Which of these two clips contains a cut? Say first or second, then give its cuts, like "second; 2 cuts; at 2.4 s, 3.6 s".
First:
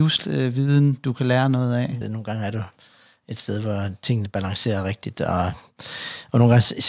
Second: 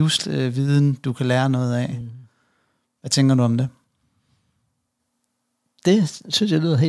first; 1 cut; at 2.0 s